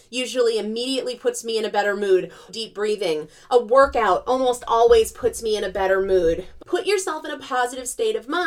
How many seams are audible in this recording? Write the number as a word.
two